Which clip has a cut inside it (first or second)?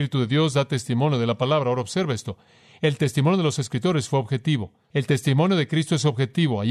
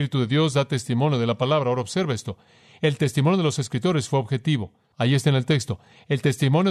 first